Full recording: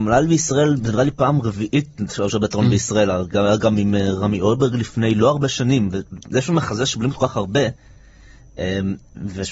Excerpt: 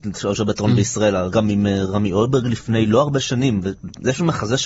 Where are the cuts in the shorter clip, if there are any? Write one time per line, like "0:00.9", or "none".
0:01.3